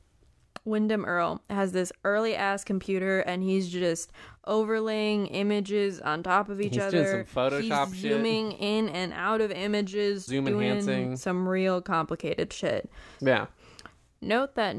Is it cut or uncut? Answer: cut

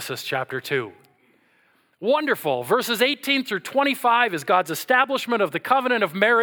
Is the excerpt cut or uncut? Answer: uncut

